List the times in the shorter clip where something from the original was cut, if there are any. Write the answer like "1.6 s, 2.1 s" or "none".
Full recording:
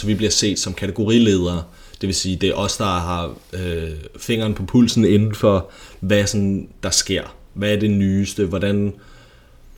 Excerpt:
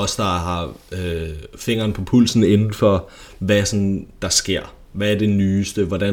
none